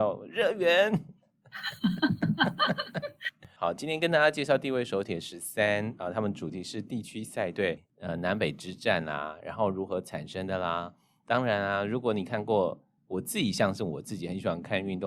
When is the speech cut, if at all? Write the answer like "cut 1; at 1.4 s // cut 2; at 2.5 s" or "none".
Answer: cut 1; at 7.9 s